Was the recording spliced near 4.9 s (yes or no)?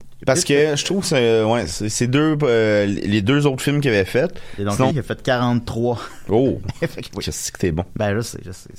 yes